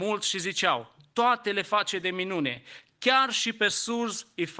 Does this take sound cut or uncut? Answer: uncut